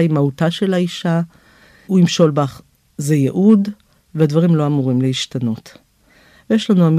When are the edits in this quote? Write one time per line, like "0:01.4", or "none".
0:01.9